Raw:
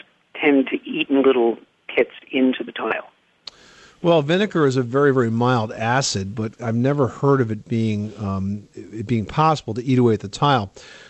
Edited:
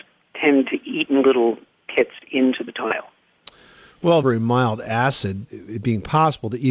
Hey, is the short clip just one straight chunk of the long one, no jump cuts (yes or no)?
no